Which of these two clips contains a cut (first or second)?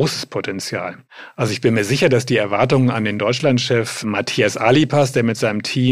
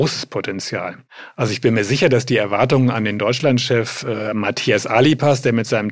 first